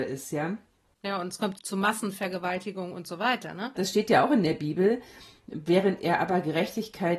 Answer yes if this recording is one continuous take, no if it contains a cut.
no